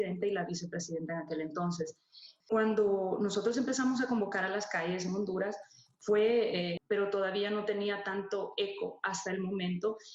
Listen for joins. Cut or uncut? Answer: cut